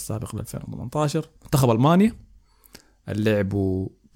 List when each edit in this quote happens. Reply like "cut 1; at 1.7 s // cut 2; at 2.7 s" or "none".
cut 1; at 1.4 s